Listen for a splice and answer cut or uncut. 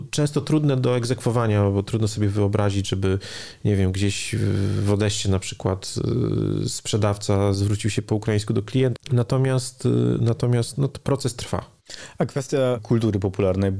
cut